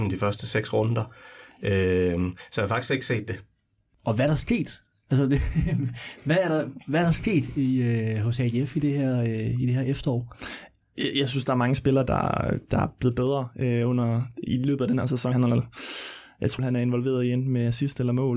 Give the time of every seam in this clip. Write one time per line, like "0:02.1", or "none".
0:15.3
0:16.6